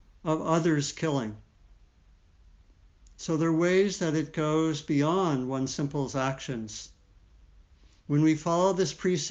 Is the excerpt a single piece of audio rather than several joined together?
yes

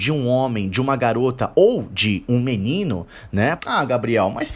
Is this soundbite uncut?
no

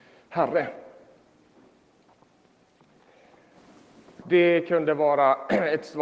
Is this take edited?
yes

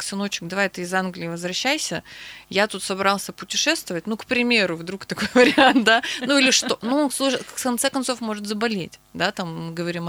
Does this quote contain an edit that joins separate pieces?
no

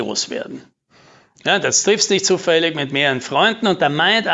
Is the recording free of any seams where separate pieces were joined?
yes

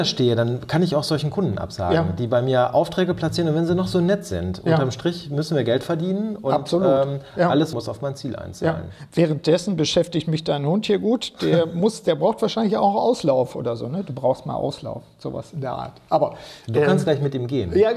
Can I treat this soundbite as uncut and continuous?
no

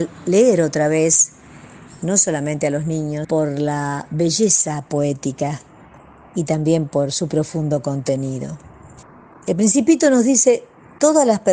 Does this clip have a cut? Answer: yes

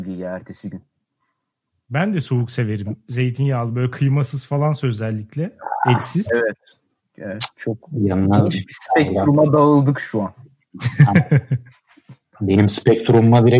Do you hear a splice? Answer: yes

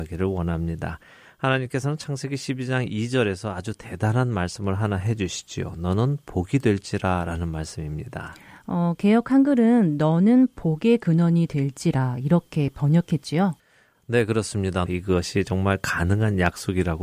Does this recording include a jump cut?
yes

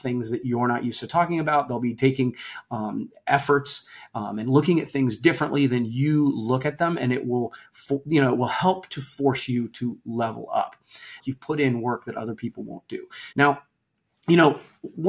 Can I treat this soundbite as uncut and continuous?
no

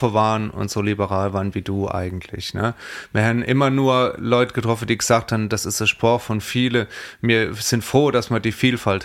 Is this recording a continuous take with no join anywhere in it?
yes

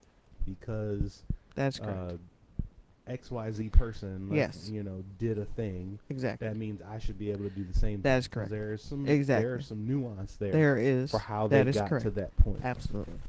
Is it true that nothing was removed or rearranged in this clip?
yes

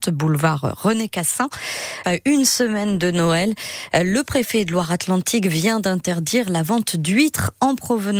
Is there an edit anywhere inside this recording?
yes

